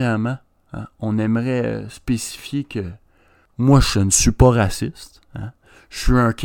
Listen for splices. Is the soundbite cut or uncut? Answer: uncut